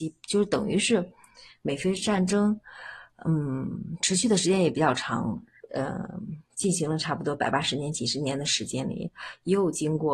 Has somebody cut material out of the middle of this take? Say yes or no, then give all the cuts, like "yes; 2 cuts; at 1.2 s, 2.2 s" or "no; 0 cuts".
yes; 1 cut; at 5.7 s